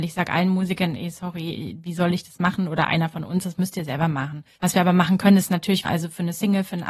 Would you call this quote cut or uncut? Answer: cut